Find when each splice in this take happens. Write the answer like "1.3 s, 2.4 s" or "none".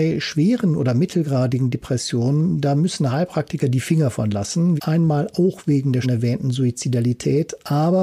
4.8 s, 6.0 s